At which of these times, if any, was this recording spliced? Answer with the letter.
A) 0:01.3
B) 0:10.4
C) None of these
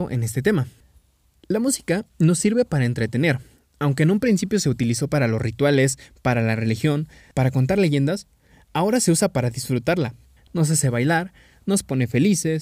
B